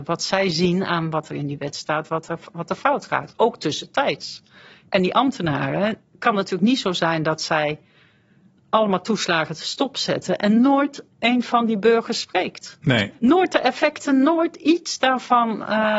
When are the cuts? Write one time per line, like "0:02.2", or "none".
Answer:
0:06.1